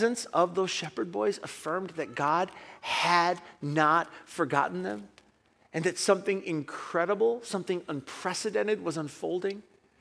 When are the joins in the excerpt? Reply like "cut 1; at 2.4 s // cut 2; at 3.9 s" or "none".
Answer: none